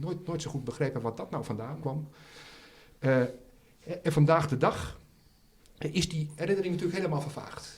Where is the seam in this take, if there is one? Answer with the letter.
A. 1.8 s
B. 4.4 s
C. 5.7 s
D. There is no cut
A